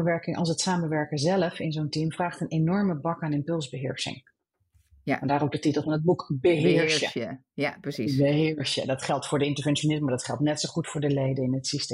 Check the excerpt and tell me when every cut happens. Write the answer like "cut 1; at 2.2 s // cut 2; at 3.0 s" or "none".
none

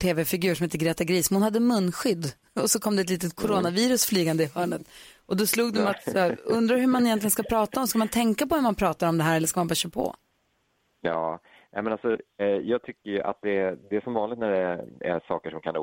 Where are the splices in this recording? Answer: cut 1; at 12.4 s

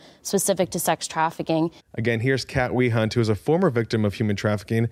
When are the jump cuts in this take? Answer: cut 1; at 1.8 s

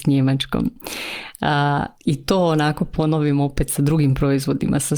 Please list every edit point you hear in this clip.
cut 1; at 1.9 s

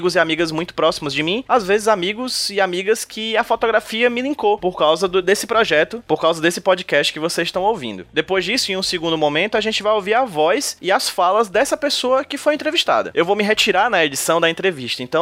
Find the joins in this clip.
none

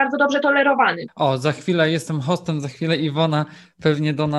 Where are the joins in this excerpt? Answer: cut 1; at 1.1 s

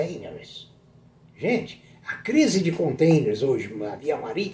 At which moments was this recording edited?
none

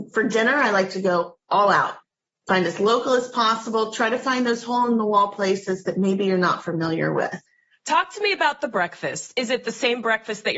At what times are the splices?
none

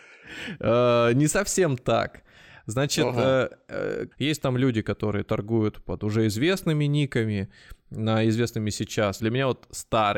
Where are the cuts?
cut 1; at 4.1 s // cut 2; at 9.2 s

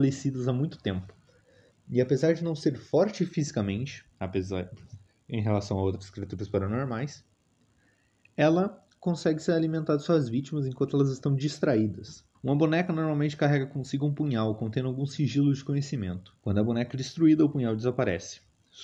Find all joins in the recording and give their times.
cut 1; at 12.3 s // cut 2; at 16.4 s

